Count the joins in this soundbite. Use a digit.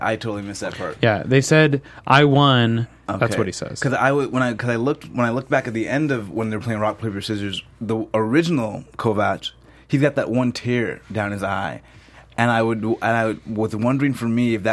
1